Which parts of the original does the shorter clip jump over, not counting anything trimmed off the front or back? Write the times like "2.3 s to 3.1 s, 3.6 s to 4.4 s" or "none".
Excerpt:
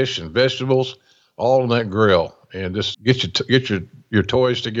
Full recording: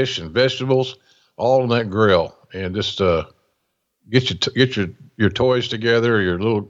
2.9 s to 4.0 s